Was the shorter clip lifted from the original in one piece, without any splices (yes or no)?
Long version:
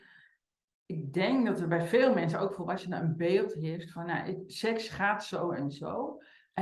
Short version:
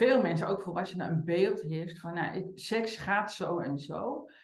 yes